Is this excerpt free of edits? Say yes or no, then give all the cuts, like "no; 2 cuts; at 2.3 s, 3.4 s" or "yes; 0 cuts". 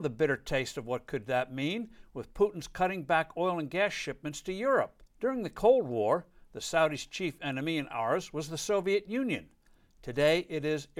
no; 1 cut; at 5.1 s